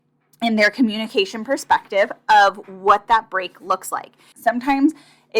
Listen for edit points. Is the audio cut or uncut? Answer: cut